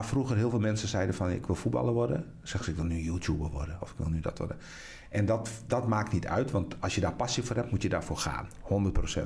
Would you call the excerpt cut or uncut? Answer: cut